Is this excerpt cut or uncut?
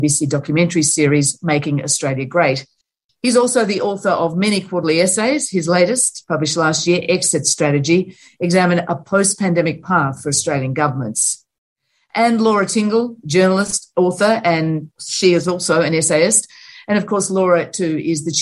uncut